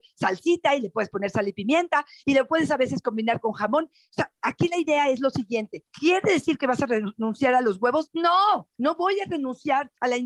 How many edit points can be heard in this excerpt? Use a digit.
0